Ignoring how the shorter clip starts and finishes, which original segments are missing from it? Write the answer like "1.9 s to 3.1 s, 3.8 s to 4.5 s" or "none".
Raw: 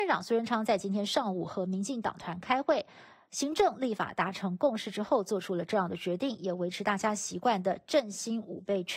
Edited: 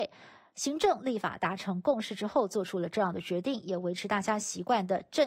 none